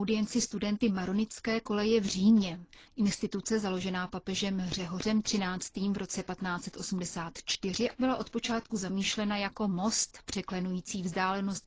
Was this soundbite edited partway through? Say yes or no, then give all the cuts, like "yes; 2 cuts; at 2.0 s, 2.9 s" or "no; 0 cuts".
yes; 1 cut; at 7.9 s